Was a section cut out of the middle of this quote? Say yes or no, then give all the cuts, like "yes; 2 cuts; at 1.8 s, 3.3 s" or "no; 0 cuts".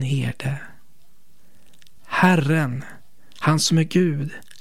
no; 0 cuts